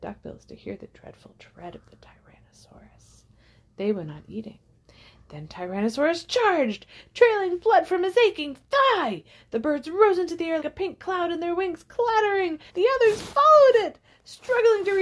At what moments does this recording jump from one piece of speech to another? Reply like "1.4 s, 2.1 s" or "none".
10.6 s, 12.7 s